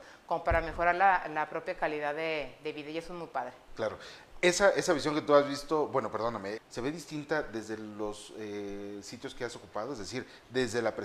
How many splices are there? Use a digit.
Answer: 1